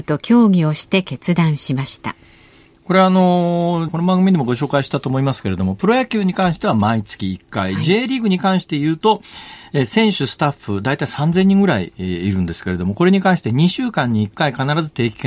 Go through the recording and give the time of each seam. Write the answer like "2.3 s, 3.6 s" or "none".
3.9 s